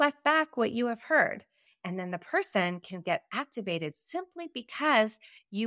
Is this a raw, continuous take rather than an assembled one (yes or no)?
no